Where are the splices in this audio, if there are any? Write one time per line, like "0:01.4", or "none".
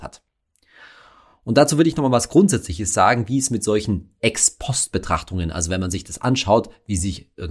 none